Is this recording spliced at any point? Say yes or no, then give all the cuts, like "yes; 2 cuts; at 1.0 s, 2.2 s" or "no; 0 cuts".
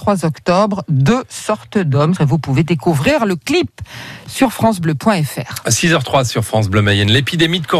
yes; 1 cut; at 2.2 s